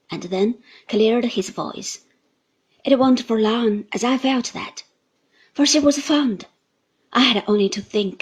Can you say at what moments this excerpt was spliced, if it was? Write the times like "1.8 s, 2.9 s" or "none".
none